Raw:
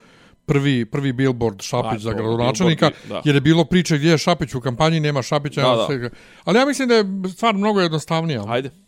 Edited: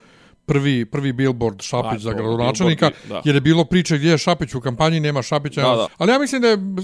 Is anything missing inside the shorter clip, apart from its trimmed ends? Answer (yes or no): yes